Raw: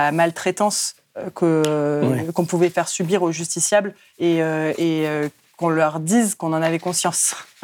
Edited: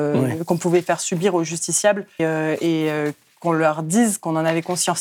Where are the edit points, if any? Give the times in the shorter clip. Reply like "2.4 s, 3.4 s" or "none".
2.2 s

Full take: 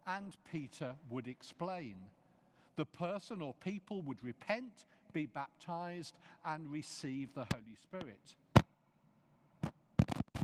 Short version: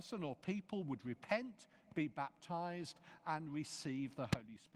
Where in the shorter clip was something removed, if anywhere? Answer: none

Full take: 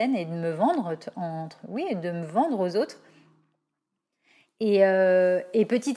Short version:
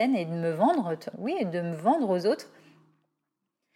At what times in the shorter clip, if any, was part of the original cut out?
1.1 s

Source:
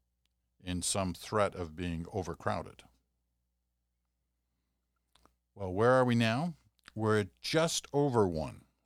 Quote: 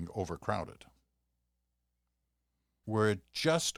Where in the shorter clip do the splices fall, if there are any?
2.8 s

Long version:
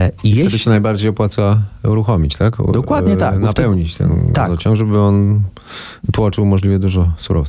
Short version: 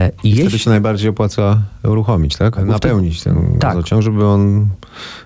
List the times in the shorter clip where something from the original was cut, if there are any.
2.6 s

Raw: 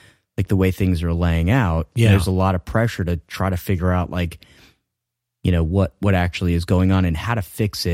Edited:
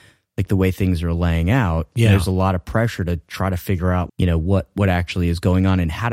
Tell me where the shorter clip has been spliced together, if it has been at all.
4.1 s

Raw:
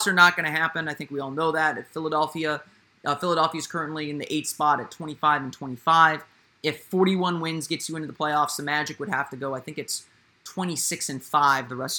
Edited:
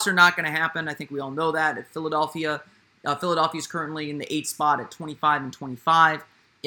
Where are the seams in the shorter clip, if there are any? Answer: none

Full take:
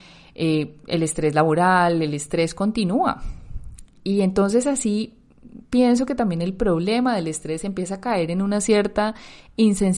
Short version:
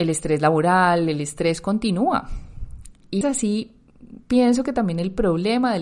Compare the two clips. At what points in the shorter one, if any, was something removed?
3.2 s

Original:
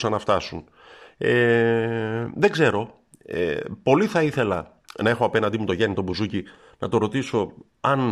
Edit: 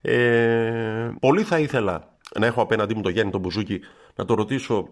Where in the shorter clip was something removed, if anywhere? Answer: 1.2 s

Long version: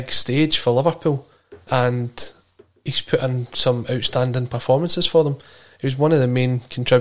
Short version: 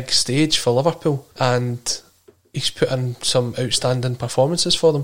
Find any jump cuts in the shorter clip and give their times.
1.3 s

